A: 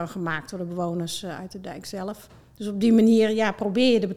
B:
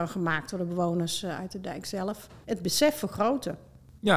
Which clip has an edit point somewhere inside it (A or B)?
B